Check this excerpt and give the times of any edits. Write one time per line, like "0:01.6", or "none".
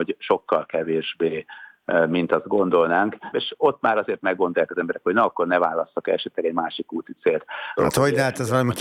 0:03.3
0:07.8